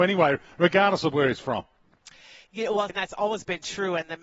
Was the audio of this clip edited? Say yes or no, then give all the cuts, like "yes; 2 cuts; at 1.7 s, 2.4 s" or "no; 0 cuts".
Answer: yes; 1 cut; at 2.9 s